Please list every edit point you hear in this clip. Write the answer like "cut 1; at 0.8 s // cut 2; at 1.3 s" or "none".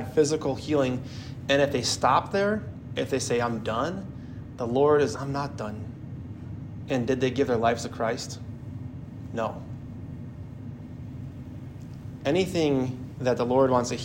cut 1; at 5.1 s // cut 2; at 6.9 s